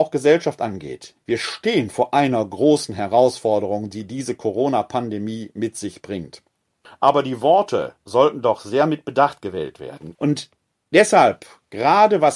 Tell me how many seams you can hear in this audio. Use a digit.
2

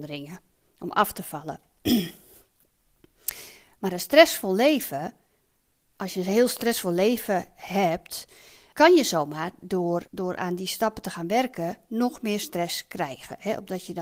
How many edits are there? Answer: 3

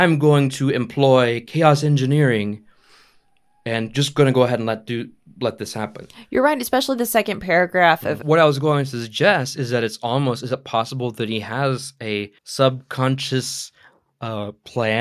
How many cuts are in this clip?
2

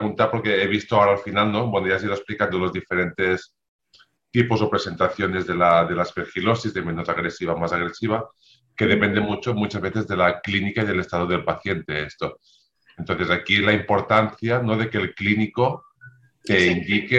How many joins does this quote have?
0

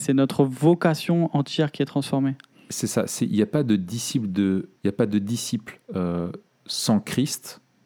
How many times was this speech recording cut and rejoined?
2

